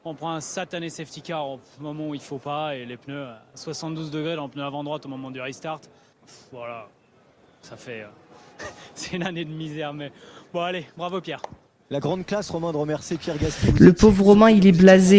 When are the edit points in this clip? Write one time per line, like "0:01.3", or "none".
0:06.1